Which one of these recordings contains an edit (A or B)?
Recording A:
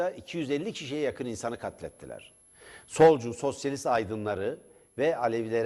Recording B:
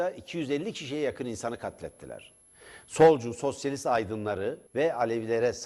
B